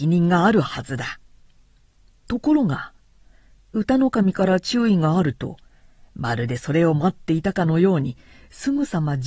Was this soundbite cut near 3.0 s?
no; 0 cuts

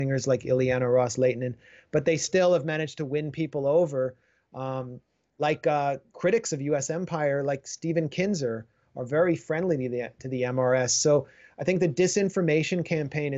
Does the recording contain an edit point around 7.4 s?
no; 0 cuts

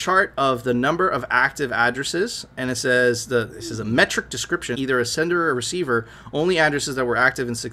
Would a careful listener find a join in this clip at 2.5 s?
no; 1 cut; at 4.7 s

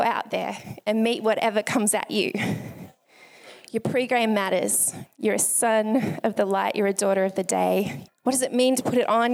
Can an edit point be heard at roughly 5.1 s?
yes; 2 cuts; at 5.1 s, 8.1 s

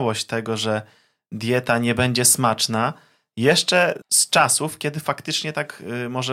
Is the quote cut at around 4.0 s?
yes; 1 cut; at 4.0 s

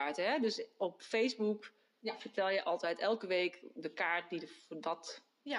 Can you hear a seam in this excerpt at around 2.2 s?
no; 0 cuts

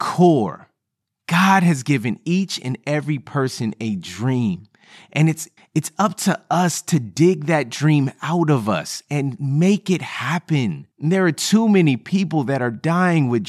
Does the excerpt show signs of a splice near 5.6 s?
yes; 2 cuts; at 5.6 s, 10.9 s

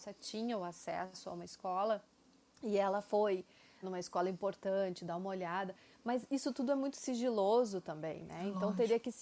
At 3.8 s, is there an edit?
yes; 1 cut; at 3.8 s

